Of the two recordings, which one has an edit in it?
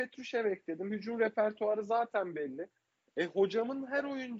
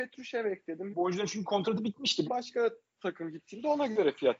second; 2 cuts; at 0.9 s, 2.3 s

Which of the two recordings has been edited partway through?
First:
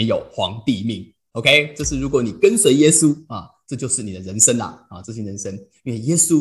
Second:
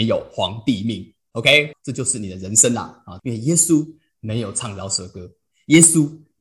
second; 2 cuts; at 1.7 s, 3.2 s

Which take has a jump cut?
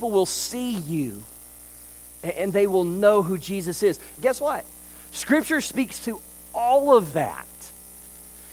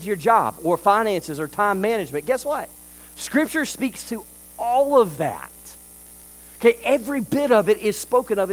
first; 1 cut; at 4.2 s

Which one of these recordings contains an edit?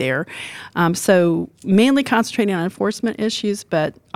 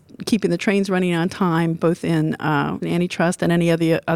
second; 1 cut; at 2.8 s

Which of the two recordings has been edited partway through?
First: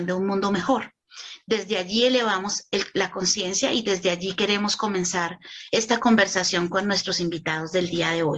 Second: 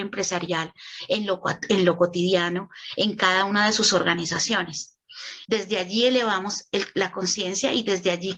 second; 1 cut; at 5.5 s

